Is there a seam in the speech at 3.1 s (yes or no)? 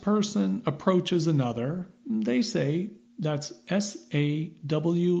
yes